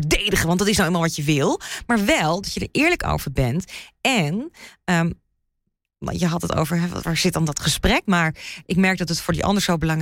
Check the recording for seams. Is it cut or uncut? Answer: cut